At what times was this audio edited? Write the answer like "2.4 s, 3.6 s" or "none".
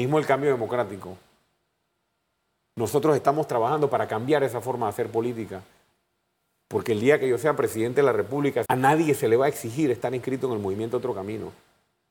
8.6 s